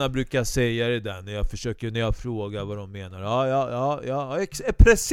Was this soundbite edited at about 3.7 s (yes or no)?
no